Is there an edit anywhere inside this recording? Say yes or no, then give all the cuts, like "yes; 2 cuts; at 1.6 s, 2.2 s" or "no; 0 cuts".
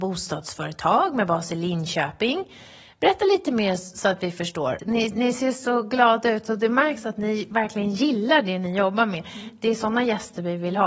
yes; 1 cut; at 4.8 s